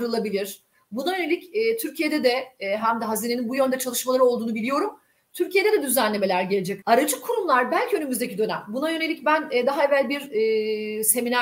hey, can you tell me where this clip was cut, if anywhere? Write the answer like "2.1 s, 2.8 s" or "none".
2.8 s, 6.8 s